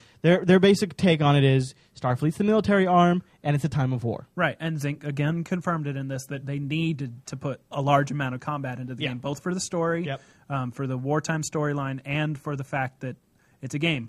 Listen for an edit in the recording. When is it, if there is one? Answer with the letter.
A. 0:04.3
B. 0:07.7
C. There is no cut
B